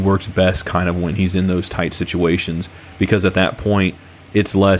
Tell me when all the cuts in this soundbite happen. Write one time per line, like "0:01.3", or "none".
none